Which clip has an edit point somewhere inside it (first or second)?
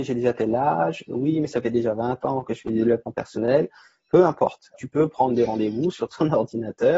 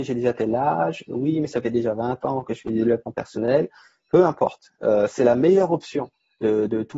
first